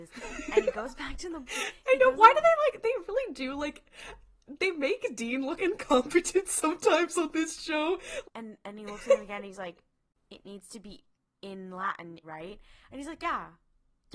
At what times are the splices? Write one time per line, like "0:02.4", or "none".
0:05.6
0:08.2
0:12.2